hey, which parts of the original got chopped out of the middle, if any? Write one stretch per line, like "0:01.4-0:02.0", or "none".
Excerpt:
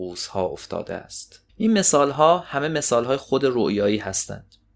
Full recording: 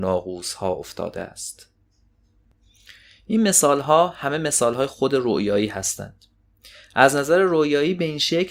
0:01.8-0:03.2